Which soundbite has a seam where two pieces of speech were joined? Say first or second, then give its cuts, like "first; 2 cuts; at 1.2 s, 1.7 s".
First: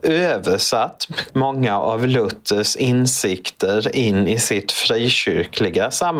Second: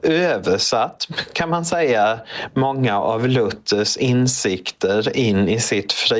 first; 1 cut; at 1.3 s